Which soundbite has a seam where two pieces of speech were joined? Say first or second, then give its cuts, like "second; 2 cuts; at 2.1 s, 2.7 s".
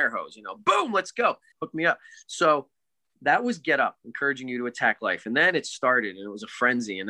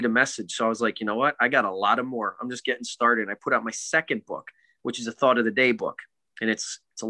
first; 1 cut; at 1.5 s